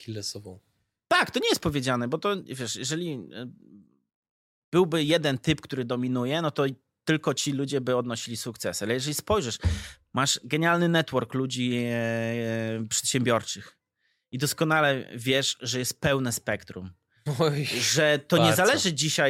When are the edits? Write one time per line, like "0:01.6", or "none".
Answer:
none